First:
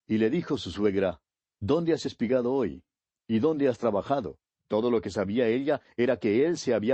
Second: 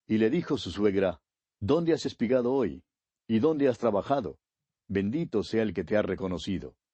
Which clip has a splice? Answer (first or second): first